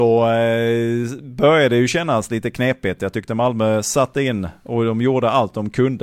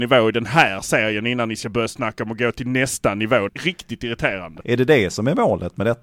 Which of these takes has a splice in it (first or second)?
second